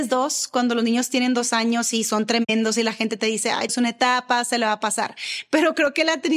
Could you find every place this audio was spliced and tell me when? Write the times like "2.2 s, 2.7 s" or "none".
3.7 s